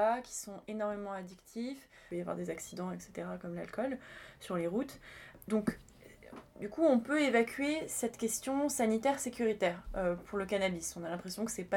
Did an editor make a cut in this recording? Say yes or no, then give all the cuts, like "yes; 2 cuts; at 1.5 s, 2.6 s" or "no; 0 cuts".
yes; 1 cut; at 6.5 s